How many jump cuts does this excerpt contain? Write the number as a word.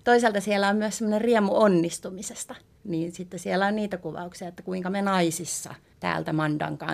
one